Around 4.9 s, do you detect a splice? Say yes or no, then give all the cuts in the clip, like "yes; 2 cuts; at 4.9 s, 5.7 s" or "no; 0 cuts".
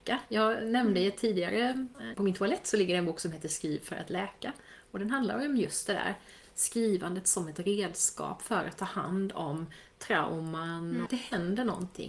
no; 2 cuts; at 2.1 s, 11.1 s